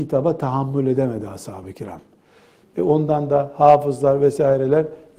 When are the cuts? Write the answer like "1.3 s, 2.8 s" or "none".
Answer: 2.6 s